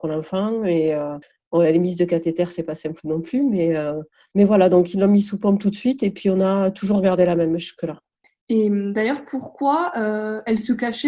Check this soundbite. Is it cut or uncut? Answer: uncut